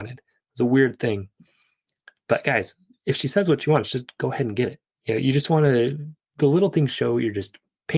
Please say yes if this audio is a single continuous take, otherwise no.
no